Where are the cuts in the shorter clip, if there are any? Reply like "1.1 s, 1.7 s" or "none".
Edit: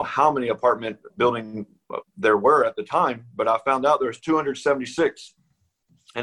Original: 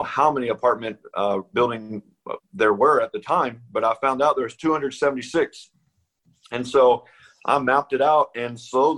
1.1 s